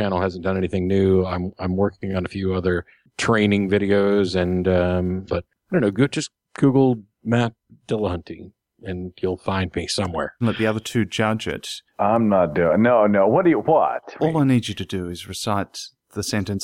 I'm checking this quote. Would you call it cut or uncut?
cut